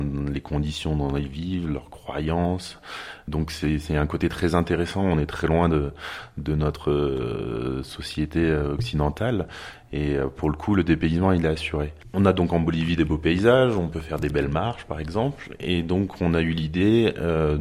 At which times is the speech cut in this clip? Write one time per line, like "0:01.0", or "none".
none